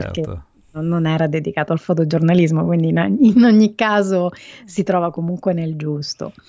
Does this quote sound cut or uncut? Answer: uncut